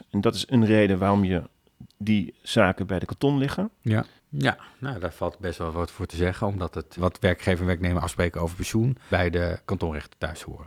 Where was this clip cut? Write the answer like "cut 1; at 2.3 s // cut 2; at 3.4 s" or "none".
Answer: cut 1; at 4.2 s // cut 2; at 7.0 s // cut 3; at 9.1 s